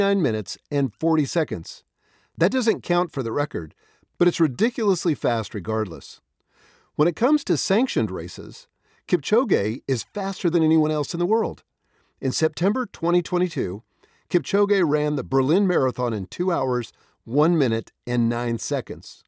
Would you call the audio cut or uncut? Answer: uncut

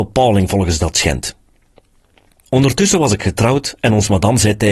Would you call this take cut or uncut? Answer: uncut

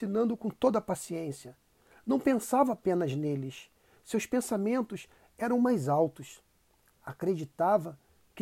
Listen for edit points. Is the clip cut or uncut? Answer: uncut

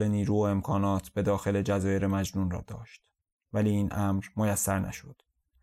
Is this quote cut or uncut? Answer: cut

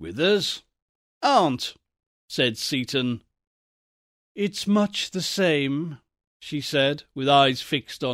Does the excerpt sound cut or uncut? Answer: uncut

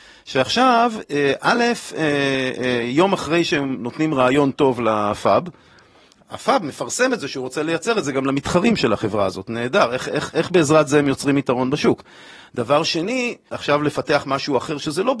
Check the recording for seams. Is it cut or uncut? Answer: cut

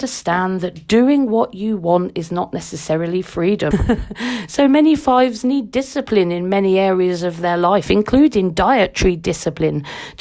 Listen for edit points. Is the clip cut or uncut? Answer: cut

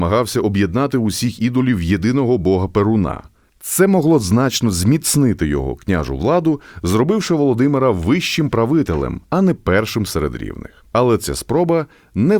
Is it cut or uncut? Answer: cut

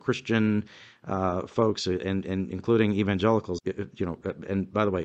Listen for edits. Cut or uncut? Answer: cut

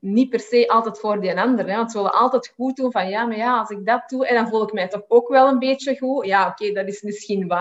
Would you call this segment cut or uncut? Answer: uncut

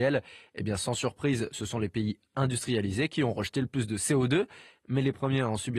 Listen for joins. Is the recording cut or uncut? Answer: uncut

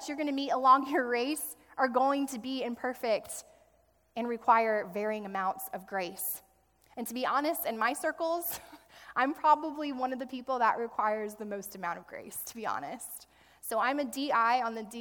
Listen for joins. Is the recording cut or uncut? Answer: uncut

